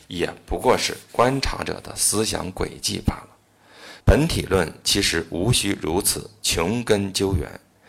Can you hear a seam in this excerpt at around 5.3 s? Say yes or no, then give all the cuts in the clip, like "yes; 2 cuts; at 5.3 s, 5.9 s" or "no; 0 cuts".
no; 1 cut; at 4.0 s